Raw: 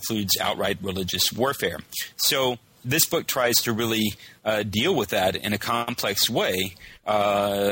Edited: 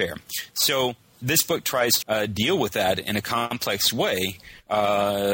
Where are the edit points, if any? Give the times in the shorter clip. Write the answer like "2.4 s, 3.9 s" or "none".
2.0 s